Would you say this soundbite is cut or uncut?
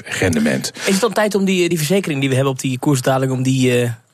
uncut